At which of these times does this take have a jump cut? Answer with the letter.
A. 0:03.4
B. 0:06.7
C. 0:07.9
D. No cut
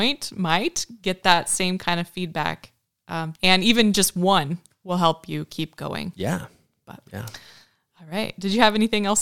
A